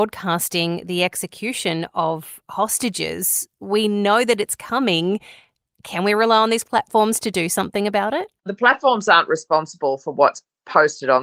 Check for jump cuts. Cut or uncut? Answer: cut